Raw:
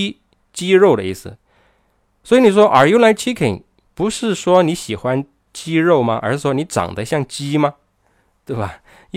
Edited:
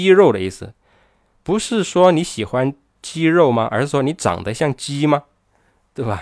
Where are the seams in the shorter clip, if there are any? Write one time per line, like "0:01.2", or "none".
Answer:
0:01.3